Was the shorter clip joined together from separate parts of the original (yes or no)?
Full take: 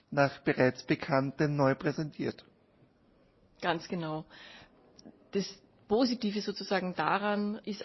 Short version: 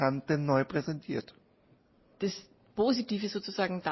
yes